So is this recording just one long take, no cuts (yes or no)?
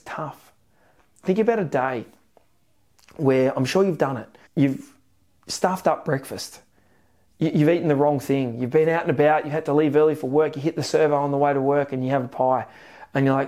no